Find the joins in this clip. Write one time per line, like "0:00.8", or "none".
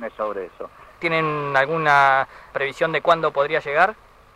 0:01.0
0:02.5